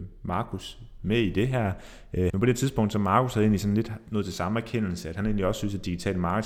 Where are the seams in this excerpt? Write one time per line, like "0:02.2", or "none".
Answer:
0:02.3